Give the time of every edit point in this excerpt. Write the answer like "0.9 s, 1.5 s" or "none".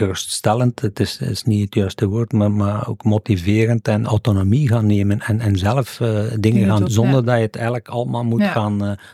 4.0 s, 6.8 s